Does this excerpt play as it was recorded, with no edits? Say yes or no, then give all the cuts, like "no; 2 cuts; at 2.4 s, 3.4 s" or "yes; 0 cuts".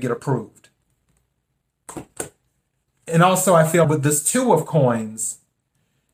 no; 1 cut; at 3.8 s